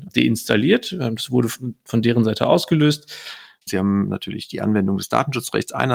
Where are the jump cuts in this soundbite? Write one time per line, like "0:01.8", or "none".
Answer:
0:03.7